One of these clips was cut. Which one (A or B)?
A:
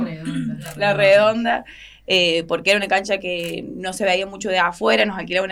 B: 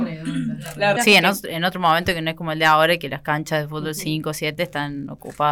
B